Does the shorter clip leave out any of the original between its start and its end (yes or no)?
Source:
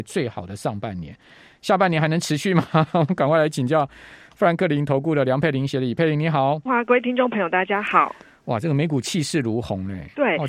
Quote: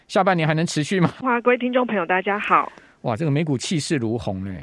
yes